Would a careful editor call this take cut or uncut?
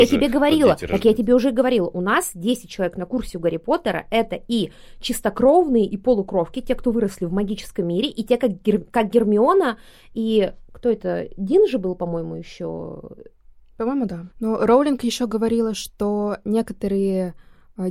cut